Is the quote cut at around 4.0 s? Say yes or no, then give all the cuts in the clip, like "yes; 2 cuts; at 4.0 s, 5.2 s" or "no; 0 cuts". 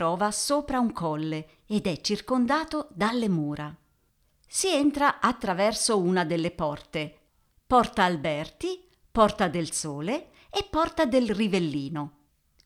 no; 0 cuts